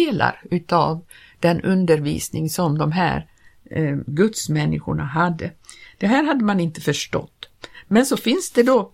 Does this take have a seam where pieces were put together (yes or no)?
no